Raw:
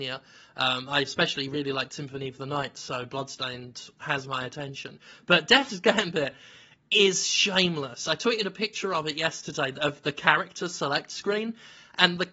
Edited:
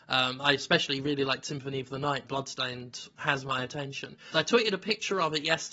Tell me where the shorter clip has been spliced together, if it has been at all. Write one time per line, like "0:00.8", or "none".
0:02.2
0:04.3